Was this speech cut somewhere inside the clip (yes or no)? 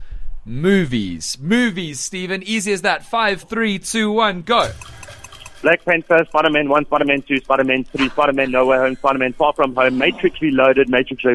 yes